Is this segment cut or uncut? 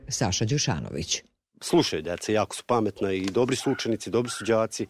uncut